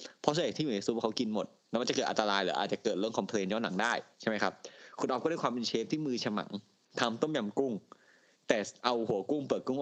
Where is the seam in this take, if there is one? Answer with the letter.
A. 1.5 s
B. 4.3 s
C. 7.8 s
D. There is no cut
D